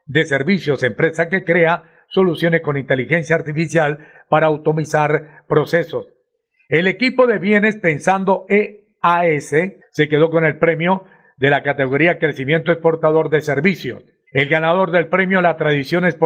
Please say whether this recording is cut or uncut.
cut